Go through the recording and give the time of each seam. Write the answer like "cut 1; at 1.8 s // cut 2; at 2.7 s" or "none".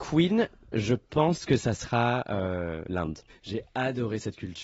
cut 1; at 3.3 s